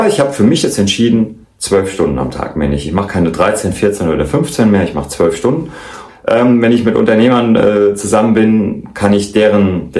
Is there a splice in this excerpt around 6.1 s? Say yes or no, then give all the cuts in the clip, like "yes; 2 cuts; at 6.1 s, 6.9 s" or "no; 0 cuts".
yes; 1 cut; at 6.1 s